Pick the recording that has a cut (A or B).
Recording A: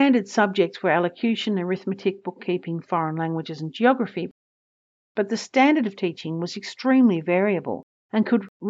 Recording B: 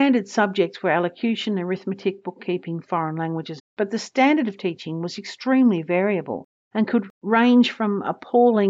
B